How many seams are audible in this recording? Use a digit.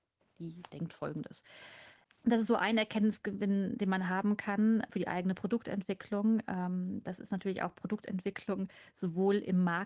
1